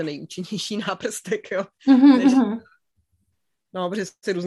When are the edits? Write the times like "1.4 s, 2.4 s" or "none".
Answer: none